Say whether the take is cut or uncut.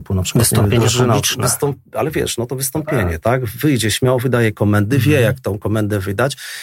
uncut